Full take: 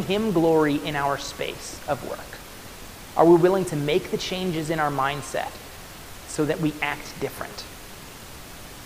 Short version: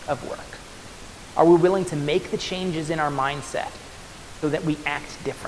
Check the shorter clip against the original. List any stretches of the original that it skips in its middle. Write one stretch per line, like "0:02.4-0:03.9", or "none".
0:06.2-0:06.4

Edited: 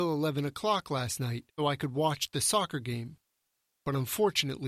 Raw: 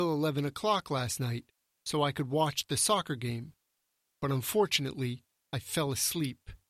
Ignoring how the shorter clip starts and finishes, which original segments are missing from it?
0:01.6-0:01.9

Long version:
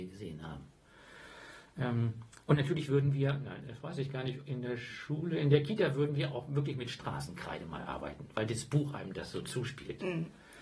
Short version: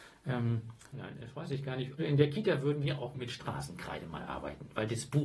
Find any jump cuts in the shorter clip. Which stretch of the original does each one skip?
0:02.4-0:03.4
0:04.5-0:05.3
0:06.5-0:06.7

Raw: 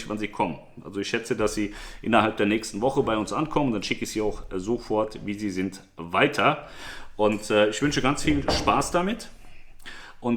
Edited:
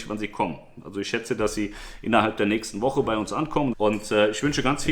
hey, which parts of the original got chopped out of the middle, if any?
0:03.7-0:07.1

